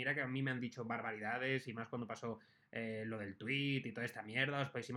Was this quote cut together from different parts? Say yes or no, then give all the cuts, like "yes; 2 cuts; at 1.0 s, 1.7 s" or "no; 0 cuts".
no; 0 cuts